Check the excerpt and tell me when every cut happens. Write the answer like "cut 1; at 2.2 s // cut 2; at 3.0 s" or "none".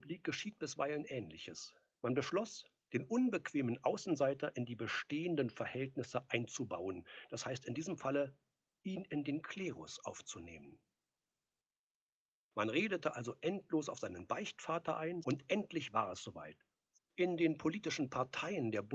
cut 1; at 15.2 s // cut 2; at 17.0 s

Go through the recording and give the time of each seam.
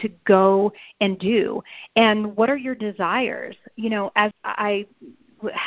cut 1; at 4.3 s

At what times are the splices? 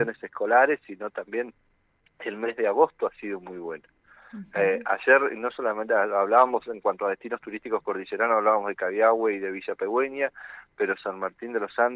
none

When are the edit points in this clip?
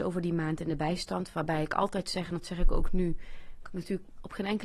none

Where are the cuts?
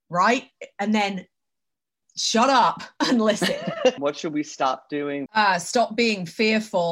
cut 1; at 4.0 s // cut 2; at 5.3 s

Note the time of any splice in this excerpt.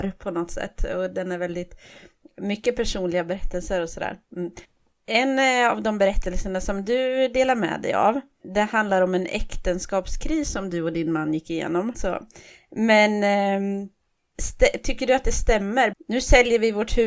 cut 1; at 11.9 s // cut 2; at 15.9 s

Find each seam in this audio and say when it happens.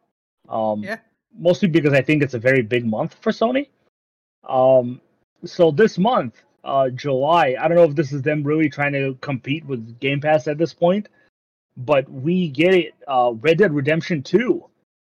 none

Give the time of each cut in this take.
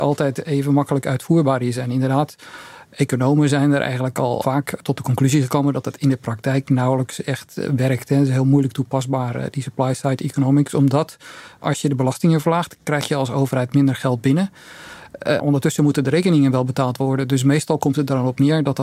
cut 1; at 15.4 s

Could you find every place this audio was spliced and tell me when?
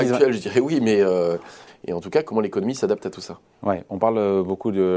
cut 1; at 1.7 s

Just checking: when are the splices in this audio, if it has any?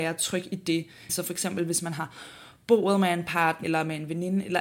cut 1; at 1.1 s // cut 2; at 3.6 s

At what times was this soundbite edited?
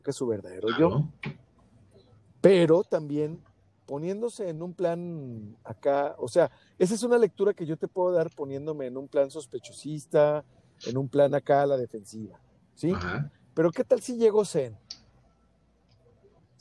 none

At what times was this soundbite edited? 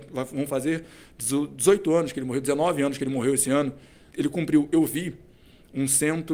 cut 1; at 4.1 s

